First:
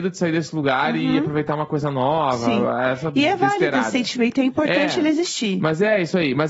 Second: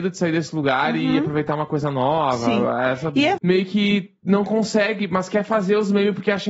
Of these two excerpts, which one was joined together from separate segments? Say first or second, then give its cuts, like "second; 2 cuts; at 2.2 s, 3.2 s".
second; 1 cut; at 3.4 s